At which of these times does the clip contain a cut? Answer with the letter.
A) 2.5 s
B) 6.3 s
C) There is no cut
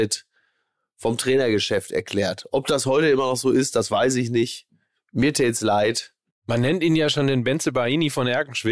C